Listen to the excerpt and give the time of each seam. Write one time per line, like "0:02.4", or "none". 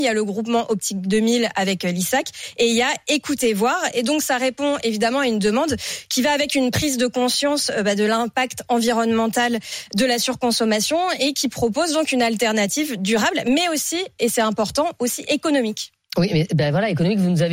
none